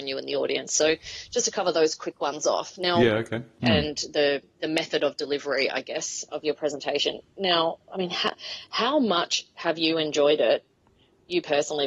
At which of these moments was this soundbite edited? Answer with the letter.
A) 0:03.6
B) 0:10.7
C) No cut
A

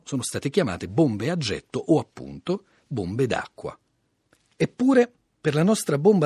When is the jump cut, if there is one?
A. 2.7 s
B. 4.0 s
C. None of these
C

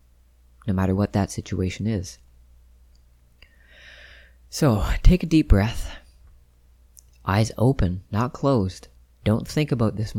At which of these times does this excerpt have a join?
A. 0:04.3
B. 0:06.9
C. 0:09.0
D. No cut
C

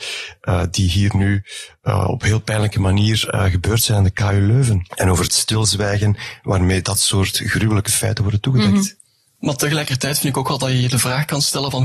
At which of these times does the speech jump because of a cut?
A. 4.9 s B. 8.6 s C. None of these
A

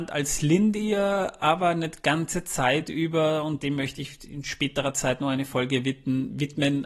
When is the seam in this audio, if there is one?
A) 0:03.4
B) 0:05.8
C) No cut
C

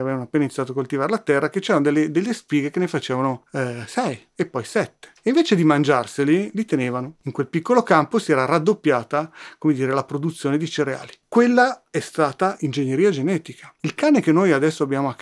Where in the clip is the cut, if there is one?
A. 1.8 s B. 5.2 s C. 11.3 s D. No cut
D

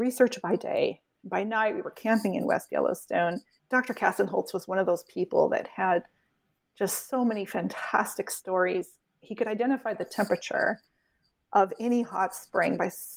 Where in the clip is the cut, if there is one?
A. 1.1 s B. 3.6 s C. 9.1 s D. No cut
B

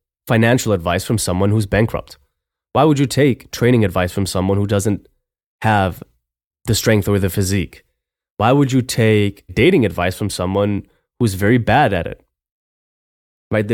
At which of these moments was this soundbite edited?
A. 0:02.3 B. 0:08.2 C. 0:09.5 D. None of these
C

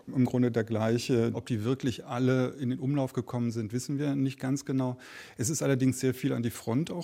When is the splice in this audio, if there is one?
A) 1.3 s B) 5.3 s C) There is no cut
A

